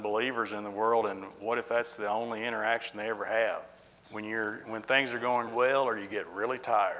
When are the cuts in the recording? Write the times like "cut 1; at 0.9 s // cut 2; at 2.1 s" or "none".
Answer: cut 1; at 4.0 s // cut 2; at 5.5 s